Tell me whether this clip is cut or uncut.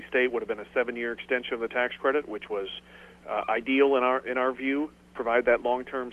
uncut